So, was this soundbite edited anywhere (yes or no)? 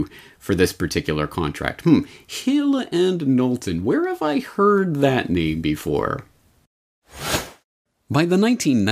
no